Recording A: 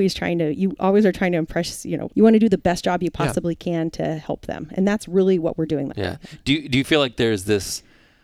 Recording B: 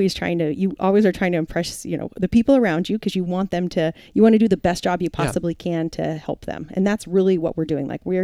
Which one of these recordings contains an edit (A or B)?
A